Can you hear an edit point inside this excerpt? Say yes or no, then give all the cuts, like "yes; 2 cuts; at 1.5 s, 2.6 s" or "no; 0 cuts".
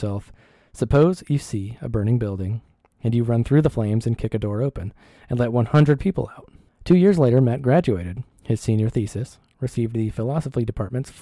yes; 2 cuts; at 6.7 s, 8.3 s